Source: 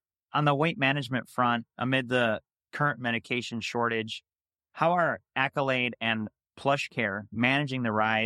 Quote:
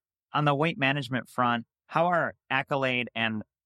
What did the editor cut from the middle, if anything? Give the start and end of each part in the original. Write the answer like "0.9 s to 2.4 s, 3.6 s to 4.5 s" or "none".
1.7 s to 4.6 s